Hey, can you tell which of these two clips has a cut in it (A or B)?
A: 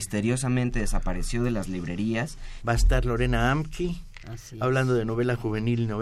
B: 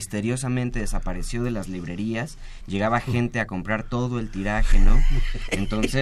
A